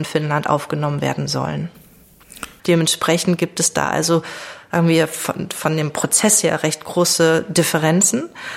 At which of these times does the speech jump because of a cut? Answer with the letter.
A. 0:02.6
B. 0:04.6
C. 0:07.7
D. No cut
A